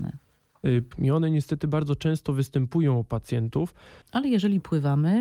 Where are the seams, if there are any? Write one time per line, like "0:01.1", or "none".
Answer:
0:00.9
0:04.0

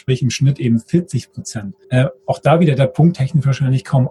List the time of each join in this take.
0:01.8
0:03.1

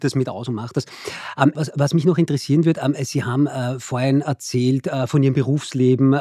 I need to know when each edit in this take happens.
0:01.5

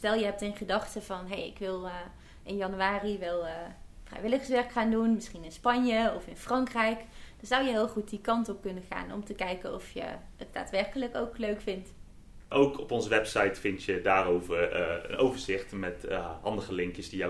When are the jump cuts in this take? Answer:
0:12.5

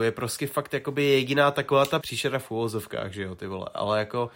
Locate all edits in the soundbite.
0:02.0

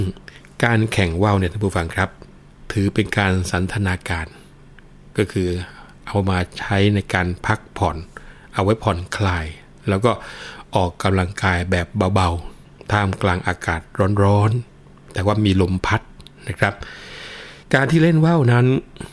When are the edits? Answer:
0:17.6

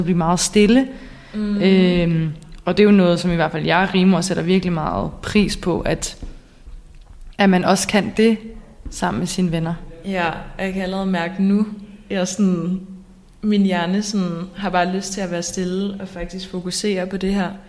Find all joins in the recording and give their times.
none

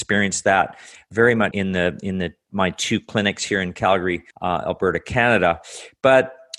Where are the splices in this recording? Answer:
0:01.5
0:04.3

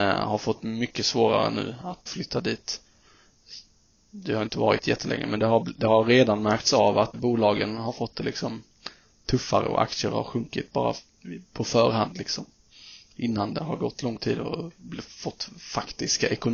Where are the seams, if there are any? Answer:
0:02.1
0:07.1

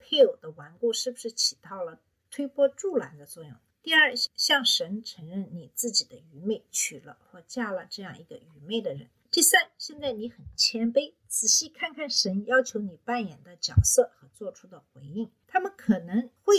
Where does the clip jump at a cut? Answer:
0:15.4

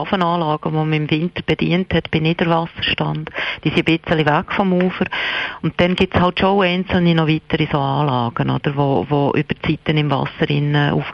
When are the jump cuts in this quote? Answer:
none

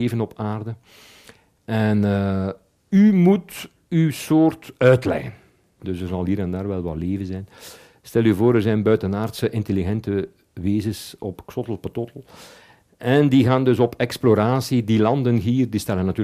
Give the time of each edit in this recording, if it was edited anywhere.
0:05.8

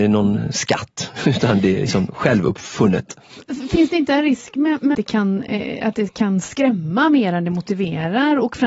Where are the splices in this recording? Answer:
0:04.9

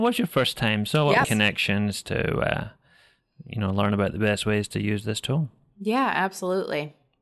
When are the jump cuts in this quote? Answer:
0:01.2

